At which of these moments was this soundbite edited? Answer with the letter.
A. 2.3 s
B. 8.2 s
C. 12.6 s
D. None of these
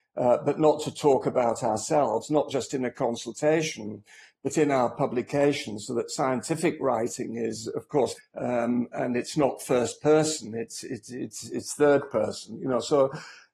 B